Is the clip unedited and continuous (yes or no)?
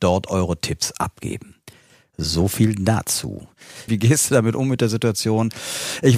no